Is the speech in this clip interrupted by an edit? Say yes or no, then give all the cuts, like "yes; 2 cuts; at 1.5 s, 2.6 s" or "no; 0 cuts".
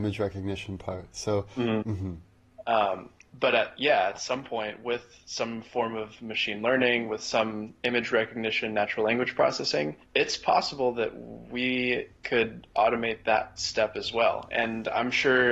yes; 2 cuts; at 1.8 s, 10.0 s